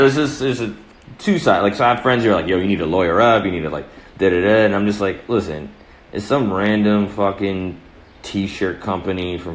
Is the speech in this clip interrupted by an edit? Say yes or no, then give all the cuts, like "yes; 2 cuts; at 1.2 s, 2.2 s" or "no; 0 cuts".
no; 0 cuts